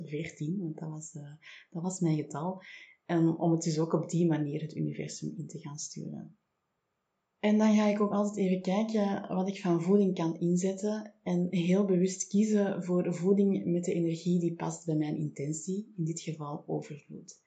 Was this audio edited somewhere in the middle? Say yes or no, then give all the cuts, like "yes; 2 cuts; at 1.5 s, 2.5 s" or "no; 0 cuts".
no; 0 cuts